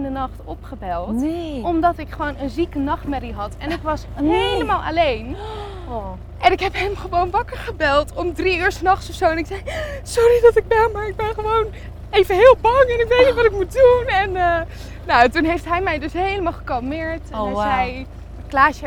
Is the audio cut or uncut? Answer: uncut